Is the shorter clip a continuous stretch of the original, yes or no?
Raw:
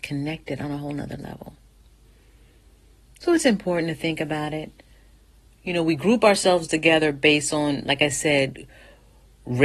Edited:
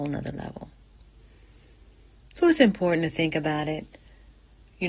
yes